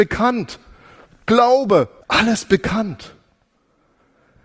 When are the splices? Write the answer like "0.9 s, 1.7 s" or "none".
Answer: 2.0 s